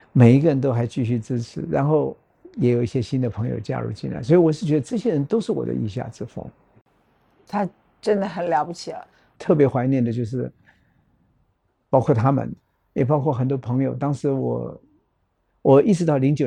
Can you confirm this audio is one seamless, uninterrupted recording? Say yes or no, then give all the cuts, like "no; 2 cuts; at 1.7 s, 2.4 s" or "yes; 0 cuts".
no; 1 cut; at 9.4 s